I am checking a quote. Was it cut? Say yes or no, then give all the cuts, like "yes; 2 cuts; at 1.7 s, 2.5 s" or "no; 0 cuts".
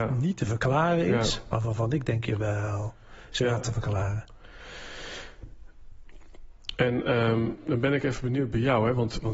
no; 0 cuts